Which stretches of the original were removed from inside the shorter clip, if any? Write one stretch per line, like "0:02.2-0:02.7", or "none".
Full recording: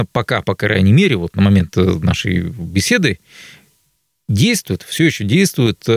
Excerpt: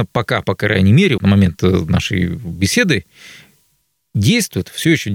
0:01.2-0:01.3

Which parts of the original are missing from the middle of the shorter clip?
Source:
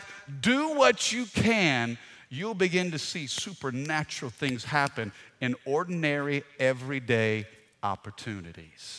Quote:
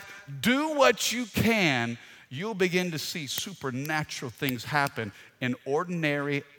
none

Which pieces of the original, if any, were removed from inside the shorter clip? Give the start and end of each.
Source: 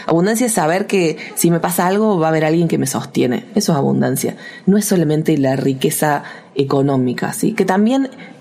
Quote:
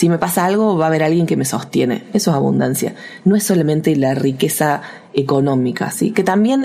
none

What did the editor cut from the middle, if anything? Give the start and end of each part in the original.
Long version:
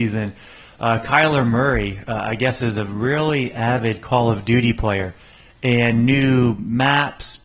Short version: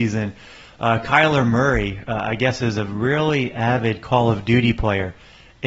none

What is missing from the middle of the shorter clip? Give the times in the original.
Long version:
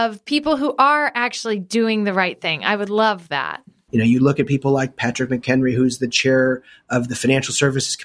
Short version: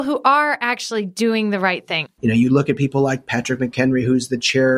0:02.6-0:03.8

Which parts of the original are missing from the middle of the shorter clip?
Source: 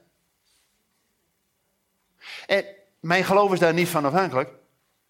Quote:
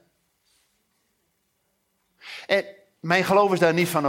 none

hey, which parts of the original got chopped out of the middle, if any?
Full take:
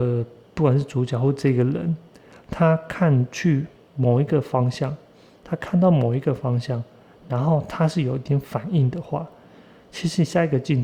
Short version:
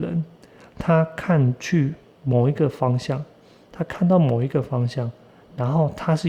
none

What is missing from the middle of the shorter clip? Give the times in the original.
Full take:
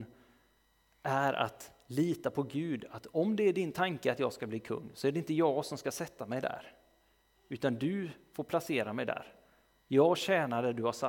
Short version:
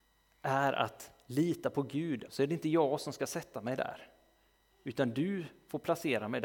0:02.9-0:04.9

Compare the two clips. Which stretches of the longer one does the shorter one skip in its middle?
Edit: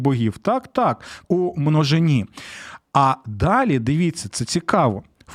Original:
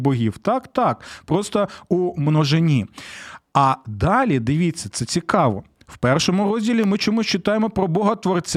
0:01.2-0:01.8

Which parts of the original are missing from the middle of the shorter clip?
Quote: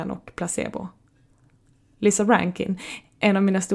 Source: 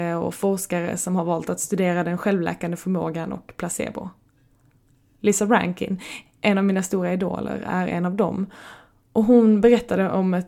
none

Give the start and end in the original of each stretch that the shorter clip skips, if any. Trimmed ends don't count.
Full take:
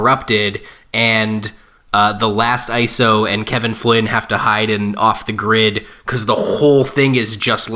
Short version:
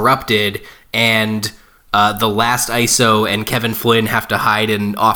none

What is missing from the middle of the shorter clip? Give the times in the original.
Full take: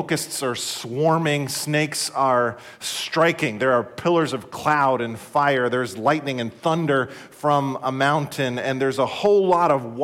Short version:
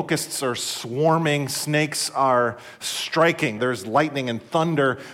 0:03.6-0:05.7

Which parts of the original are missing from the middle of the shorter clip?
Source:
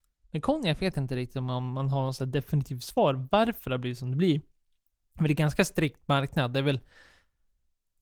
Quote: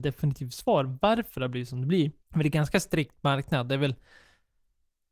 0:04.5-0:05.0

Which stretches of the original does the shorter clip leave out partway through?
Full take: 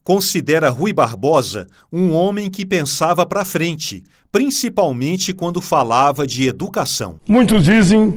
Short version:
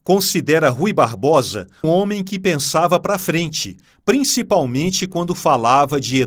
0:01.8-0:02.1

